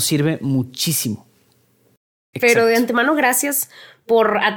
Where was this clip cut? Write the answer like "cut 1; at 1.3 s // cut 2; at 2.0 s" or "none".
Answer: cut 1; at 2.3 s